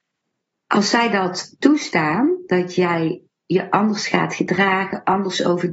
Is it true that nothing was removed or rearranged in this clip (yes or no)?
yes